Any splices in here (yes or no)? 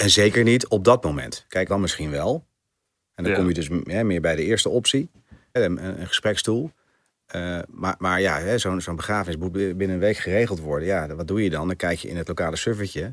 yes